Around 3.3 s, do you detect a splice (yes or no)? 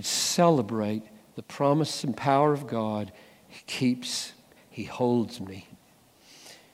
no